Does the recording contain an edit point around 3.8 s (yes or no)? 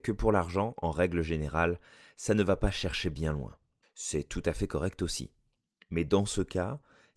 yes